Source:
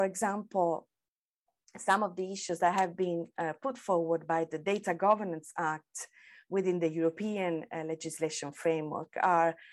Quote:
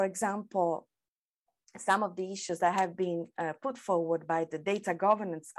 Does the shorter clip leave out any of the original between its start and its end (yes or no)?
no